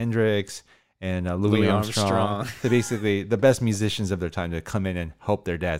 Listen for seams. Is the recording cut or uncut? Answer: uncut